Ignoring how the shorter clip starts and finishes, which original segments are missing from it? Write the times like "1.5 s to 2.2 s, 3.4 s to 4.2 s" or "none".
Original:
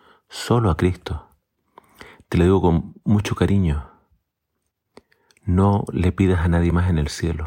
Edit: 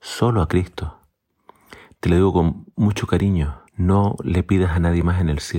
4.0 s to 5.4 s